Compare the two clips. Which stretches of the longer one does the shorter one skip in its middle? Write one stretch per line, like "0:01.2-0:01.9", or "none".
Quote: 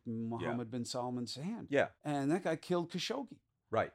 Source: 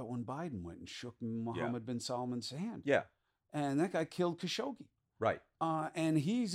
0:03.1-0:03.4